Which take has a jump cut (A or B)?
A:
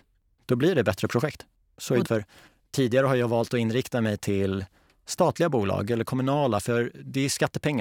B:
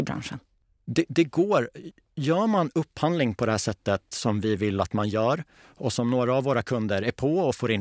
A